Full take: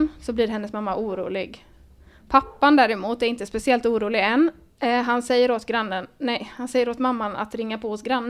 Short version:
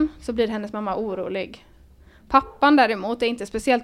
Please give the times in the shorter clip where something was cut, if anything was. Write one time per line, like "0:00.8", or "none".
none